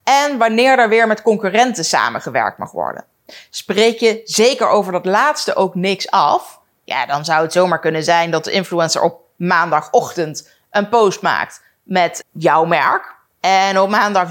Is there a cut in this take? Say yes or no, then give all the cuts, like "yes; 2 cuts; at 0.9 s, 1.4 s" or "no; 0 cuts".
yes; 1 cut; at 12.2 s